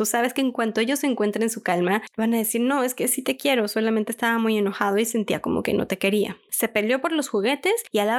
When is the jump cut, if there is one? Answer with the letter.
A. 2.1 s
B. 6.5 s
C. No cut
B